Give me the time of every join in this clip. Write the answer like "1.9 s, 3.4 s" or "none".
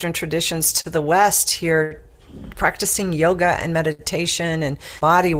none